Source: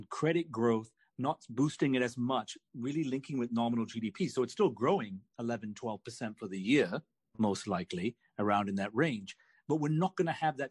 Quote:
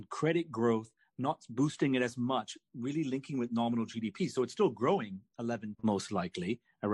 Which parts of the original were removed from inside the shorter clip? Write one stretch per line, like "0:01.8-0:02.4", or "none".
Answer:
0:05.7-0:07.3

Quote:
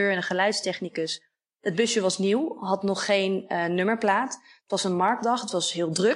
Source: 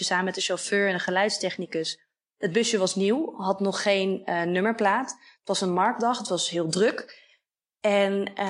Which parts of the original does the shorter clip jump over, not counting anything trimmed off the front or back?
none

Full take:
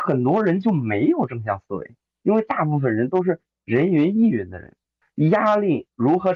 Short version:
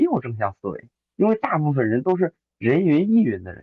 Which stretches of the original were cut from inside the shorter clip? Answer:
none

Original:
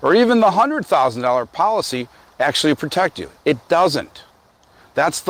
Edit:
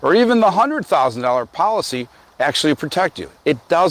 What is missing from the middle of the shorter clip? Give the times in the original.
none

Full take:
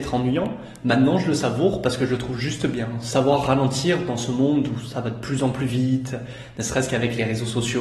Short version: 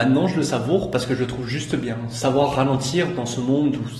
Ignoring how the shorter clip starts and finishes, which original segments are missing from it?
none

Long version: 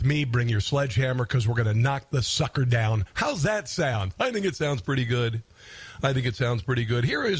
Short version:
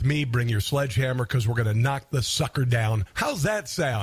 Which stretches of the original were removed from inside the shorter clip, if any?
none

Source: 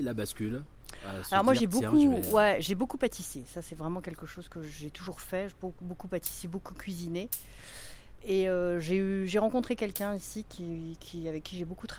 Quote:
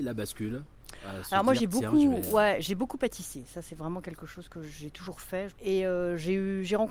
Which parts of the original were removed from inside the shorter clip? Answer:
0:05.6-0:08.2

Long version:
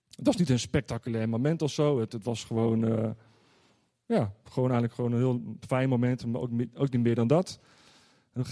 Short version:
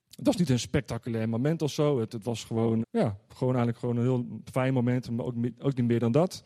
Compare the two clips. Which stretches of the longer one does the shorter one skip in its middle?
0:02.8-0:04.0

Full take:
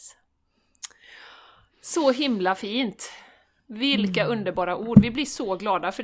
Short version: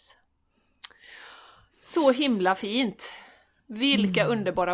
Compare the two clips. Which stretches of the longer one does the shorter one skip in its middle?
none

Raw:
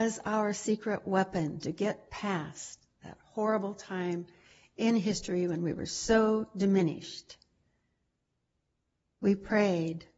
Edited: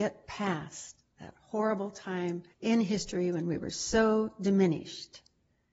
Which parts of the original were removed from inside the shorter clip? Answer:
0:04.3-0:04.7

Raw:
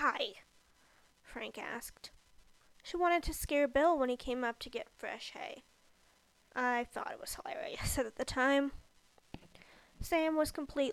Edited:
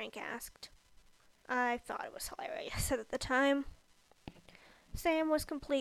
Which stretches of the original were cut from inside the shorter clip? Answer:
0:02.7-0:06.4

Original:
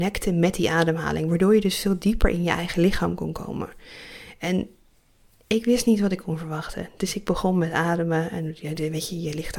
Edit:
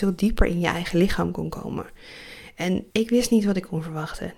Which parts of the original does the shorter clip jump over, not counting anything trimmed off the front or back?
0:04.7-0:05.5

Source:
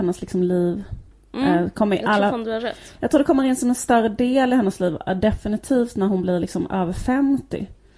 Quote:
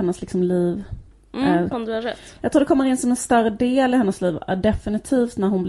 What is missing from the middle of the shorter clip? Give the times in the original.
0:01.7-0:02.3

